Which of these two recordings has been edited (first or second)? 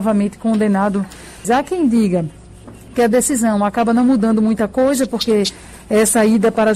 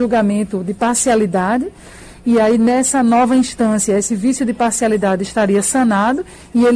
first